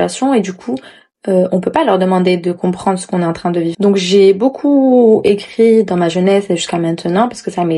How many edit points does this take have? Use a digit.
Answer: 1